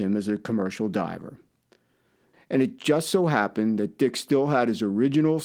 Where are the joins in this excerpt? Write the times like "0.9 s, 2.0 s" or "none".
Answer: 2.3 s